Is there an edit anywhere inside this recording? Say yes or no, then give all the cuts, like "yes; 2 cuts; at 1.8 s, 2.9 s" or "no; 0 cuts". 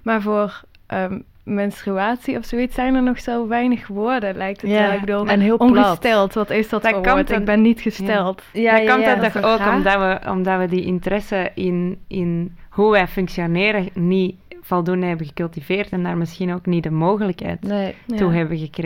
no; 0 cuts